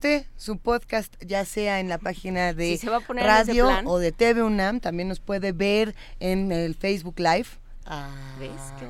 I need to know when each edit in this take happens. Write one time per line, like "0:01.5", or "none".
0:07.8